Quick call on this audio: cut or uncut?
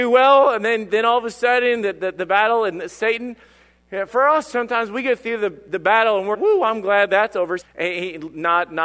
cut